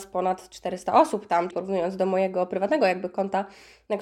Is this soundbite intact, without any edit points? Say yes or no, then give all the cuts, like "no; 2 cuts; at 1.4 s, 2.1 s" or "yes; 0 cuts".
no; 1 cut; at 1.5 s